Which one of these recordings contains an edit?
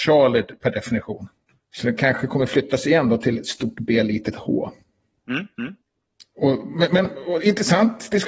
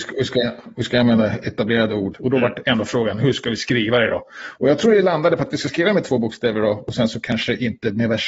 second; 1 cut; at 2.1 s

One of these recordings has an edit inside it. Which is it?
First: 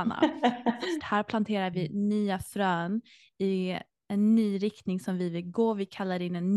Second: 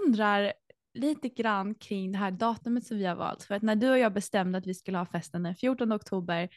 first; 1 cut; at 1.0 s

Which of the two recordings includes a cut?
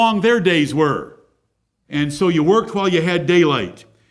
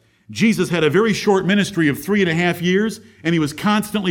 first; 1 cut; at 1.8 s

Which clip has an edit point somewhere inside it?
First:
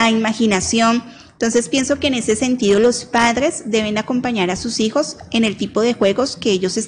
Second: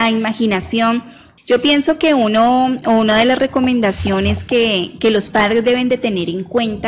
second; 1 cut; at 1.4 s

